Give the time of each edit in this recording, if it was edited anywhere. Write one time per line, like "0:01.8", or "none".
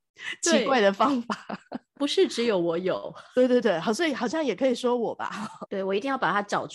0:03.6
0:05.7